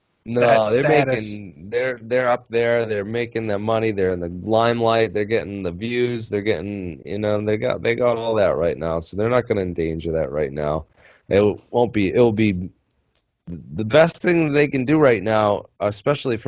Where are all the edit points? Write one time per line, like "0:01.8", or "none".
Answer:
none